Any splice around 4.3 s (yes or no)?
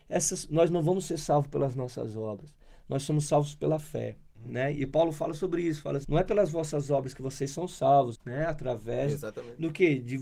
yes